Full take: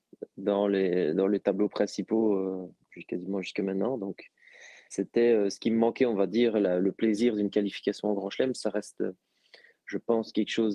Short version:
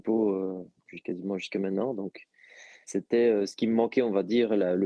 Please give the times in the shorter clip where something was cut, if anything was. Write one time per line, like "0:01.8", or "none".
none